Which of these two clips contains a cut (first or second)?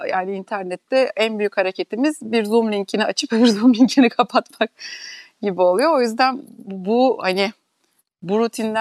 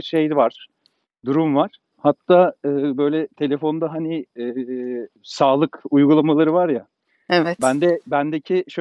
second